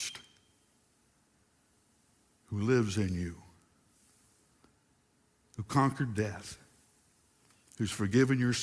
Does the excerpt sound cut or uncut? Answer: uncut